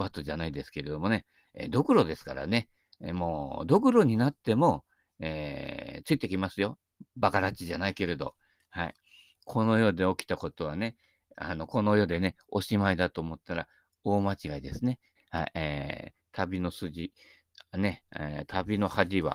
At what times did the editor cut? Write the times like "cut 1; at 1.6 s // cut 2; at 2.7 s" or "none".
cut 1; at 15.2 s